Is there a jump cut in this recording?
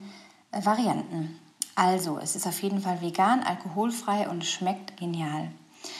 yes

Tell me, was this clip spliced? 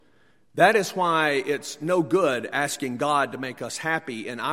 no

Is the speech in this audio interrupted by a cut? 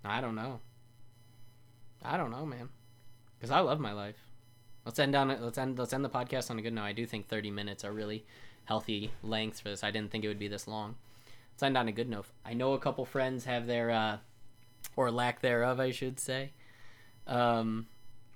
yes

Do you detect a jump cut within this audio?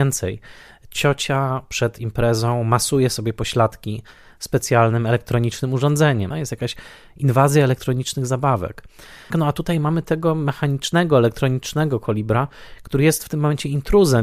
yes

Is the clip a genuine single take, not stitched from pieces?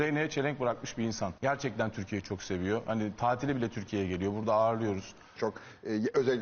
no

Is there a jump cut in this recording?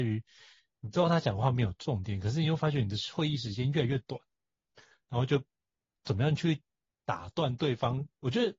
no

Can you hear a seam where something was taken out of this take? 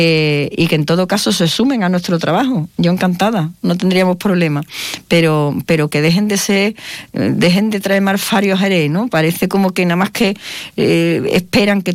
no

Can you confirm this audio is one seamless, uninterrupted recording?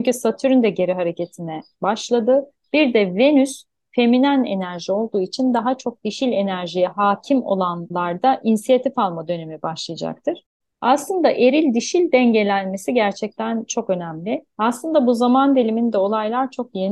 no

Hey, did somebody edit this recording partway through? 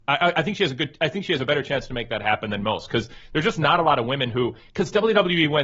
no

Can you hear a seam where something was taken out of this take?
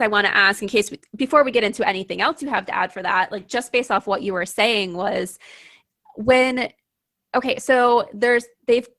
no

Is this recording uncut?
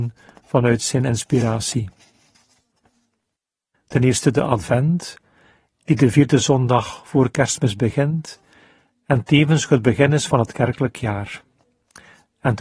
no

